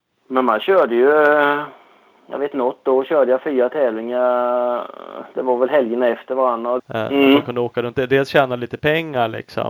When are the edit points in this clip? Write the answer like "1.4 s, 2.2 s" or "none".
6.8 s